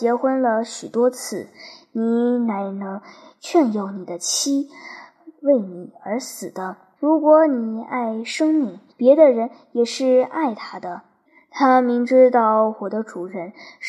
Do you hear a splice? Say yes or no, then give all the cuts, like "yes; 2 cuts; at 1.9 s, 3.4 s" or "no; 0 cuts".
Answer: yes; 3 cuts; at 7.0 s, 8.9 s, 11.3 s